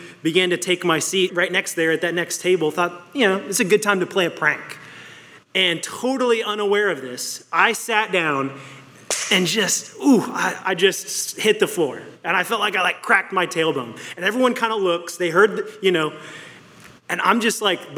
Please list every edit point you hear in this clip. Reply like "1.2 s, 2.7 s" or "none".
1.3 s, 5.4 s